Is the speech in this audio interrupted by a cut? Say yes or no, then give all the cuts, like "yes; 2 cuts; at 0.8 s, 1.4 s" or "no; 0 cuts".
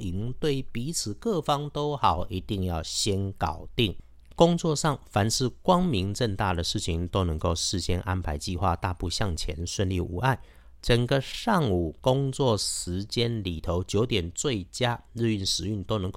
yes; 1 cut; at 10.8 s